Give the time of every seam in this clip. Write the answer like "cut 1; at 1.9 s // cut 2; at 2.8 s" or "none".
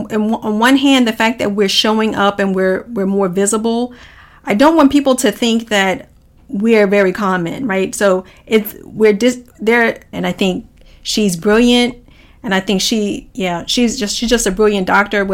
cut 1; at 10.1 s